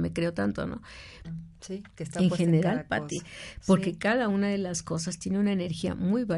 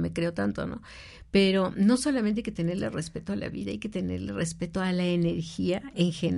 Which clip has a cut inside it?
first; 1 cut; at 1.2 s

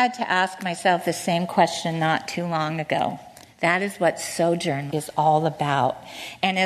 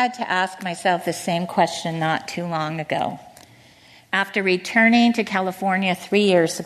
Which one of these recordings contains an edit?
first; 2 cuts; at 3.5 s, 4.9 s

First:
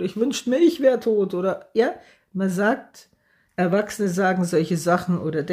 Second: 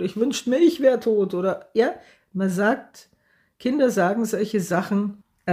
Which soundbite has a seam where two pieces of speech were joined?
first; 1 cut; at 3.5 s

